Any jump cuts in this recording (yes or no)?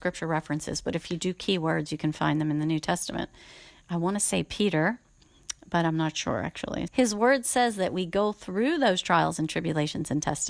yes